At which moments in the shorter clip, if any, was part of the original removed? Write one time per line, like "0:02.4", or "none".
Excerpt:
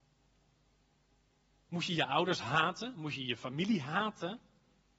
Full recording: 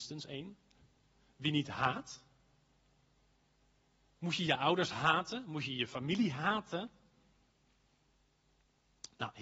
none